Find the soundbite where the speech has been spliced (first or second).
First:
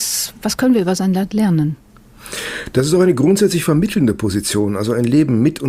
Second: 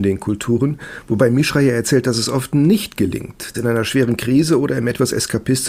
second